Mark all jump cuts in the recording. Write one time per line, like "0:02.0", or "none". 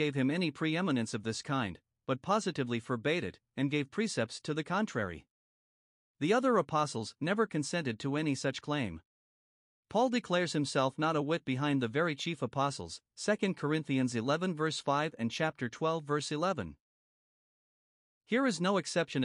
none